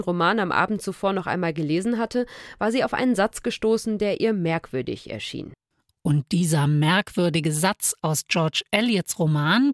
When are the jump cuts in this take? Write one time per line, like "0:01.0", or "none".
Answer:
none